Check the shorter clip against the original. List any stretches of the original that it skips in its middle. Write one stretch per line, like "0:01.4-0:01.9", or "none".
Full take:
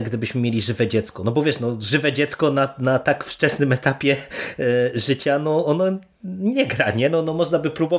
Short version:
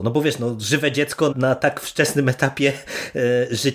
0:02.5-0:02.7